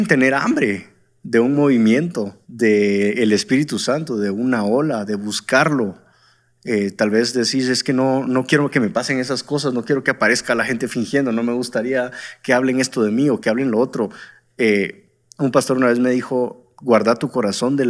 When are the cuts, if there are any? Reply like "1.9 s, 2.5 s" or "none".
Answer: 2.4 s